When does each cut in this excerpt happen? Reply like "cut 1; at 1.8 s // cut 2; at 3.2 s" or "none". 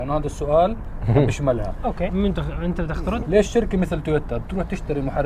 cut 1; at 2.1 s // cut 2; at 3.2 s